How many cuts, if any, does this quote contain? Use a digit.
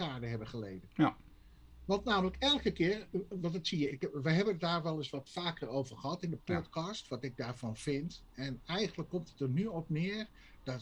1